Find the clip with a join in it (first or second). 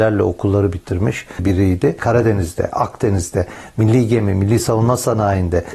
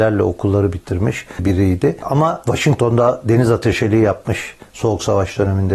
first